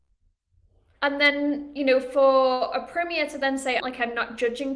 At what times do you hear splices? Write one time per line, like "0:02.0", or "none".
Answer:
0:01.0
0:03.8

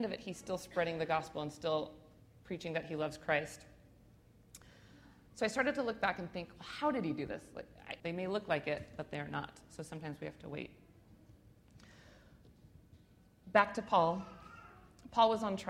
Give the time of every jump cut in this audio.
0:08.0

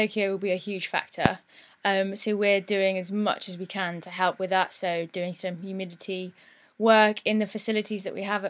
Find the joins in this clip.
none

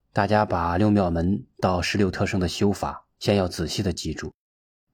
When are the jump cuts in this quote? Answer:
0:03.1

